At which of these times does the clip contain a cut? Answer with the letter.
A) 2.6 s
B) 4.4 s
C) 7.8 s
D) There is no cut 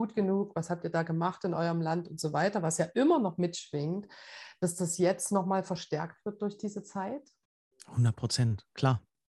D